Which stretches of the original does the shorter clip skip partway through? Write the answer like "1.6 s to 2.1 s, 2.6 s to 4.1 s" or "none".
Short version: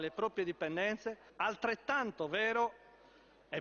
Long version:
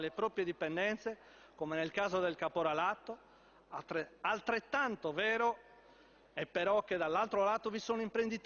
1.3 s to 4.1 s